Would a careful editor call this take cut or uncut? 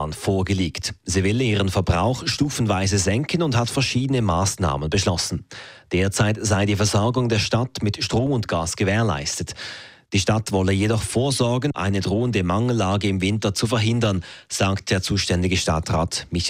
cut